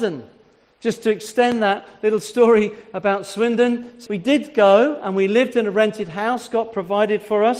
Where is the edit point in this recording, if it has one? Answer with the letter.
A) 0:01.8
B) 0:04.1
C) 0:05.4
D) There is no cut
B